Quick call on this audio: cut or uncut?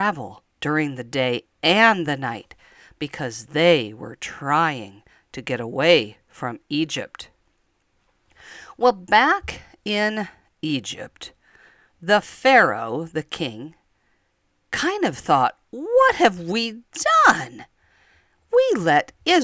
uncut